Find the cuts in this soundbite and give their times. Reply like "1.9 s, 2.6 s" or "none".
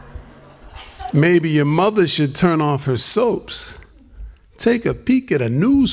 1.1 s